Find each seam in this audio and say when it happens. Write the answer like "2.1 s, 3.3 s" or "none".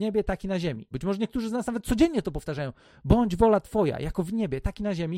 0.9 s